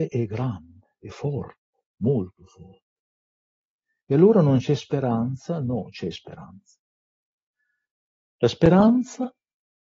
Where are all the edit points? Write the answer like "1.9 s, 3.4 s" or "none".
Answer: none